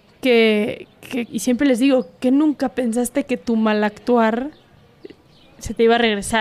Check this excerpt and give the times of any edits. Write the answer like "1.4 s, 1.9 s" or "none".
1.3 s